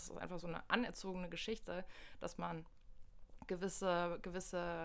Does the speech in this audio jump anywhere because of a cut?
no; 0 cuts

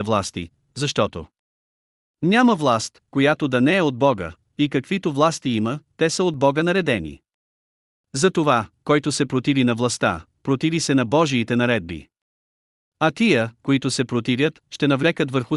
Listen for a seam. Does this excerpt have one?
no; 0 cuts

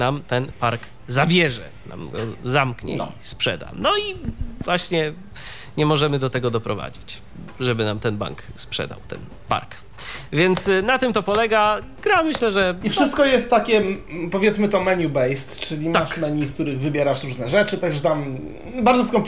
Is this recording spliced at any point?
no; 0 cuts

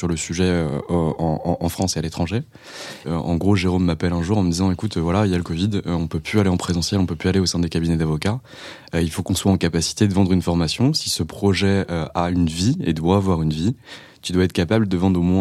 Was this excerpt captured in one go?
no; 1 cut; at 3.0 s

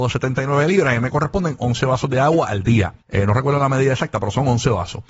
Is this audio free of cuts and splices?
no; 1 cut; at 3.0 s

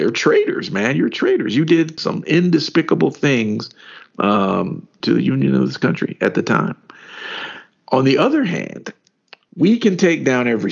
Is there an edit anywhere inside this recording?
yes; 3 cuts; at 2.0 s, 5.0 s, 9.5 s

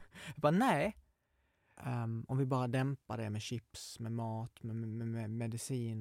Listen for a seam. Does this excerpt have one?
yes; 1 cut; at 1.8 s

